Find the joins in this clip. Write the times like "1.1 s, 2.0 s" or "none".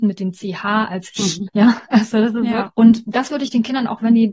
1.5 s, 2.7 s